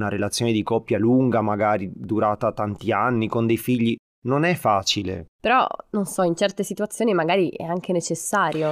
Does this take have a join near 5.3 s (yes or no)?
yes